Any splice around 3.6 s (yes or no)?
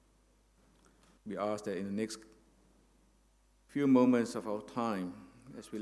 no